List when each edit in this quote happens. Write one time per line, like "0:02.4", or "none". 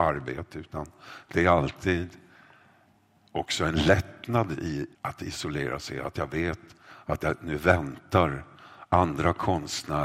0:04.9